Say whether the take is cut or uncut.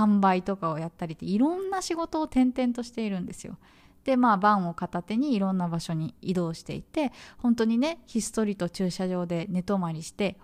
uncut